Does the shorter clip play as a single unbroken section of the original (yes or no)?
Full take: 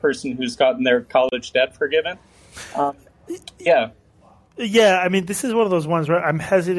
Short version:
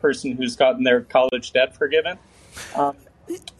yes